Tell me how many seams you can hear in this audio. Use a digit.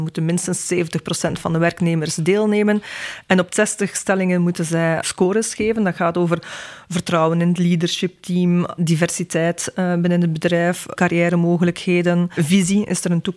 1